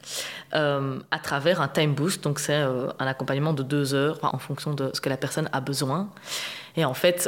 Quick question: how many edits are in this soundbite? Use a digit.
1